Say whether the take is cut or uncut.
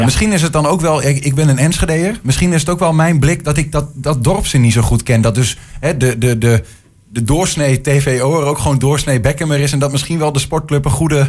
uncut